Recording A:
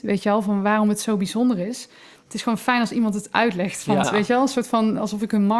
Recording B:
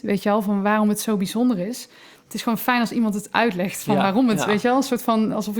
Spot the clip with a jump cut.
A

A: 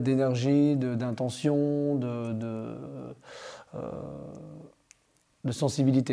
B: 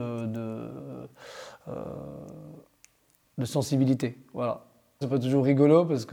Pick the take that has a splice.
B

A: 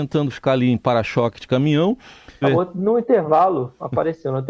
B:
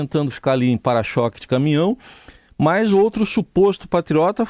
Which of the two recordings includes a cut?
A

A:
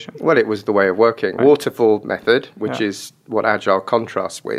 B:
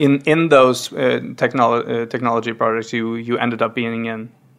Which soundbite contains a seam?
A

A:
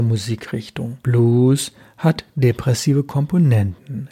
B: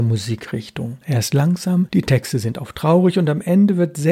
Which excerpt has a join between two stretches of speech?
B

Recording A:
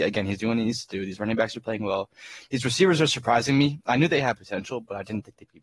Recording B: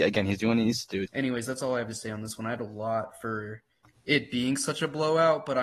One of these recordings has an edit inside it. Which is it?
B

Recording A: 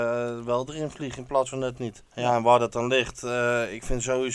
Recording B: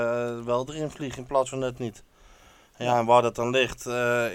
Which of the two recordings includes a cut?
A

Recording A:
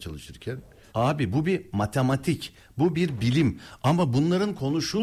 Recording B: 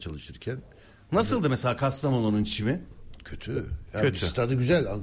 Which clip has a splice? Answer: A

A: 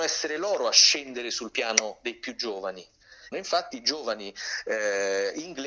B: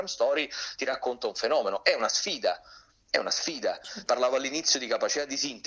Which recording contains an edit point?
A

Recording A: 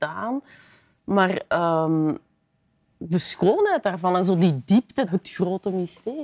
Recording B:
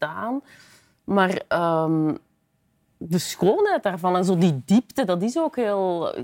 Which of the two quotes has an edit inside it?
A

